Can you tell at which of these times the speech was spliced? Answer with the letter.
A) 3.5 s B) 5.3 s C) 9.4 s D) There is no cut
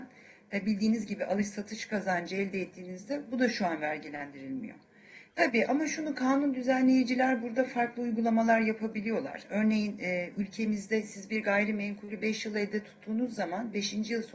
B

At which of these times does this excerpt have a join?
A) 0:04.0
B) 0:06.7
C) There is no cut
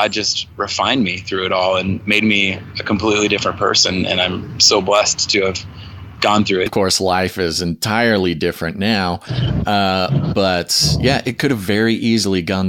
B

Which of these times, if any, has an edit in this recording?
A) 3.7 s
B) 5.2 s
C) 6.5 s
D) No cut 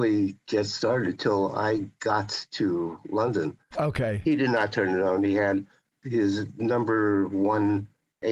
A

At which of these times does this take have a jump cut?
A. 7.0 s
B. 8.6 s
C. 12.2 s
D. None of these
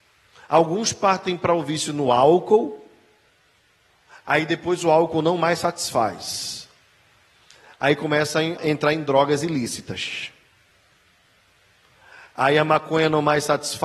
B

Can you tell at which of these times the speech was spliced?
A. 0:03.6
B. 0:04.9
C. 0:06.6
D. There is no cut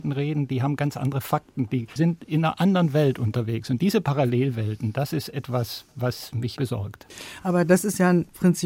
C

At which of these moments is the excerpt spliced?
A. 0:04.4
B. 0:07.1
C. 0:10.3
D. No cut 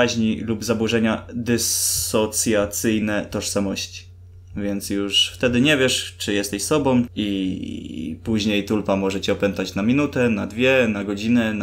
B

